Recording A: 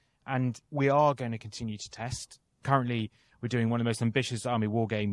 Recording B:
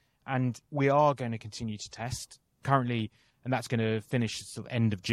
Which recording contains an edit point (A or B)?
B